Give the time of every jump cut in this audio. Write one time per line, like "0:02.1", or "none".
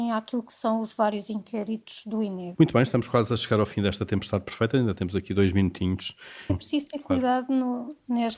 0:02.5
0:06.5